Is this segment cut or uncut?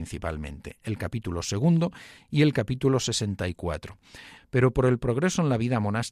cut